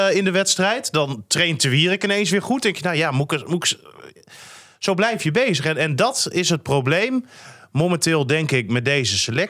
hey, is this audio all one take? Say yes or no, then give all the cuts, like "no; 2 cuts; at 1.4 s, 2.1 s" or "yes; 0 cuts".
yes; 0 cuts